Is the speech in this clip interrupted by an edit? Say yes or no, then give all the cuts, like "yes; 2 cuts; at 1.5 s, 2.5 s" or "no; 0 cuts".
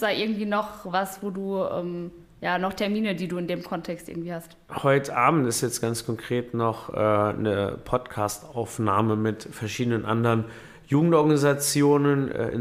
no; 0 cuts